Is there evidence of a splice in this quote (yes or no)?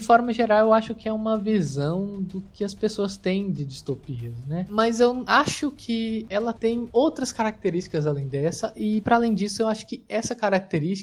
no